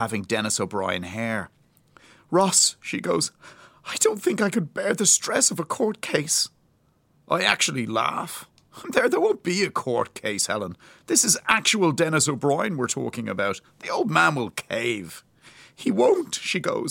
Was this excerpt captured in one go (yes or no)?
yes